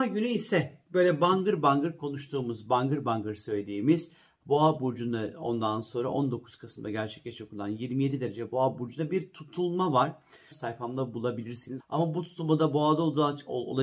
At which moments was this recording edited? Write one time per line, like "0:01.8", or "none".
0:10.5
0:11.8

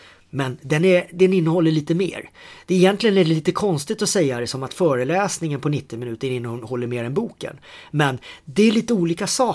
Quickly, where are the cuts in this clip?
none

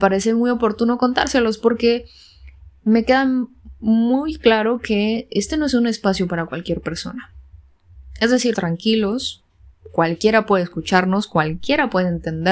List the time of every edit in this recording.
0:08.5

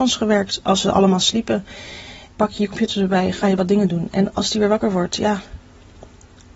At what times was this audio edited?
0:02.3

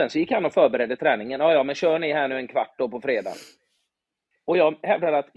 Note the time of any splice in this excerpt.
none

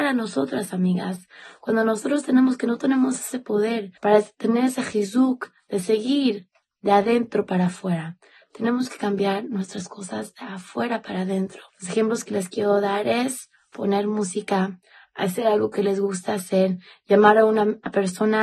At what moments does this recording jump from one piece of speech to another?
0:04.0
0:11.7

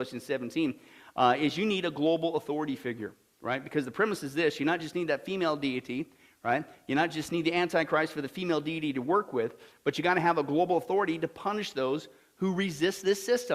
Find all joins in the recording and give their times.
none

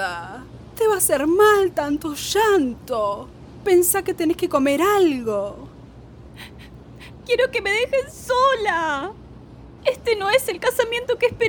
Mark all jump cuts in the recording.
0:07.2
0:09.8

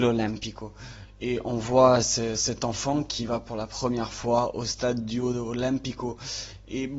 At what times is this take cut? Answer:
none

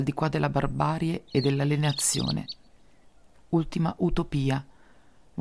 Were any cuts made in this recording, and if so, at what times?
none

